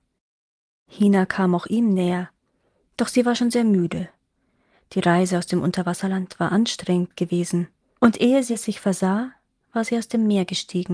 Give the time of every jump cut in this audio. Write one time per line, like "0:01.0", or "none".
0:08.0

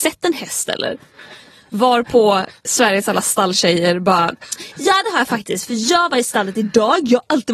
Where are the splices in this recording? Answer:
none

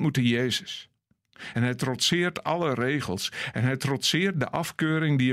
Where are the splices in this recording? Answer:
none

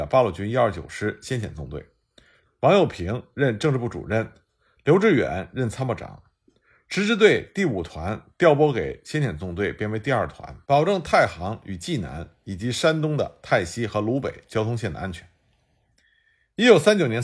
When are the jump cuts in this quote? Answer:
0:02.5
0:10.6

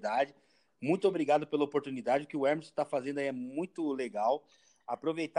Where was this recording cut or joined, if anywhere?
none

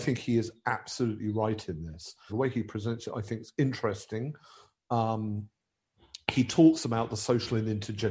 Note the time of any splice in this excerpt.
0:02.3

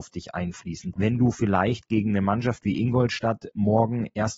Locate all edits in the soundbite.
0:00.9

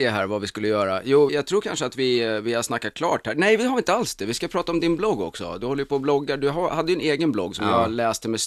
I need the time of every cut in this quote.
0:01.3

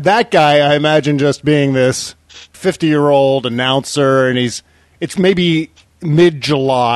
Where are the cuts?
0:02.5

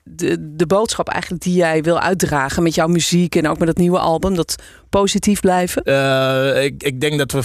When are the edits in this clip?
0:05.9

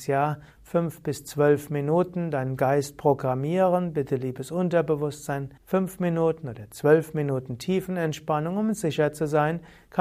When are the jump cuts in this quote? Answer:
0:05.6

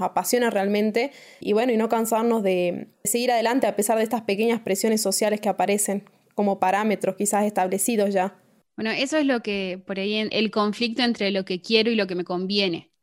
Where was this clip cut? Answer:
0:08.6
0:10.3

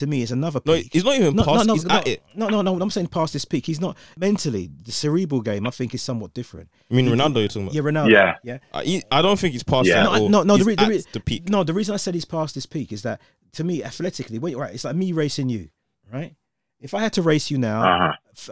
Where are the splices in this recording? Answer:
none

